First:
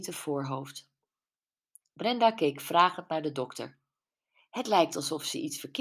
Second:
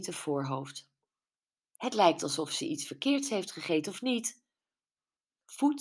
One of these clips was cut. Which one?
second; 1 cut; at 1.8 s

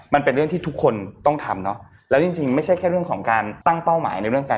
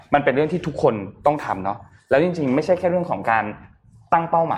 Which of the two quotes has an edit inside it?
first; 1 cut; at 3.6 s

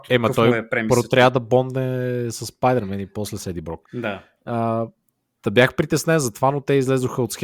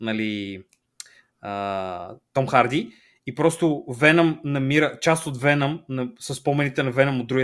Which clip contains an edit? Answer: first; 1 cut; at 3.8 s

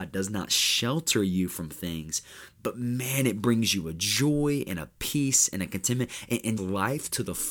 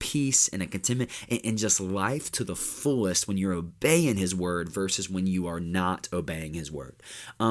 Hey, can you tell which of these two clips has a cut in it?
first; 1 cut; at 6.6 s

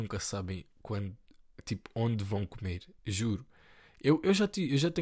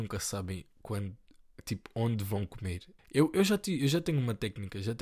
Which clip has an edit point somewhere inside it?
second; 1 cut; at 3.0 s

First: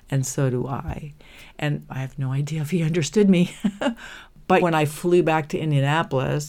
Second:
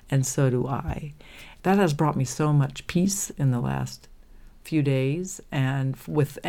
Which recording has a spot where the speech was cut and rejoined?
first; 2 cuts; at 1.5 s, 4.6 s

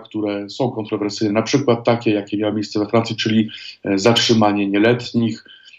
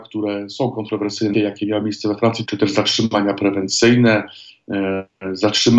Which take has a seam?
second; 2 cuts; at 1.3 s, 2.5 s

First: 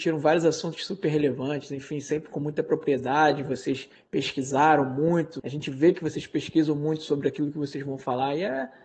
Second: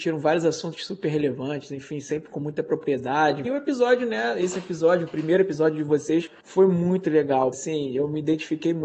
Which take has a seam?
second; 2 cuts; at 3.4 s, 7.5 s

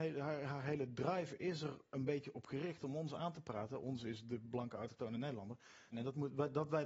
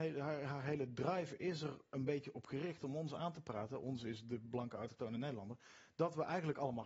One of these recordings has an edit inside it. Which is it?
first; 1 cut; at 5.9 s

